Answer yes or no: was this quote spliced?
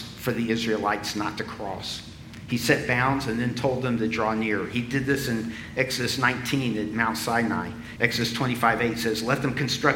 yes